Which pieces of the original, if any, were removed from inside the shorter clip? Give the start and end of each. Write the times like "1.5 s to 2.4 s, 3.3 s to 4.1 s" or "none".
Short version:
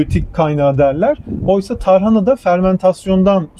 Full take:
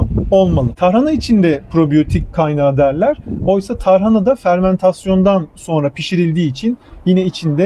none